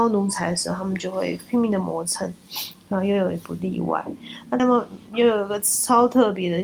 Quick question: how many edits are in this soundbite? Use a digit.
1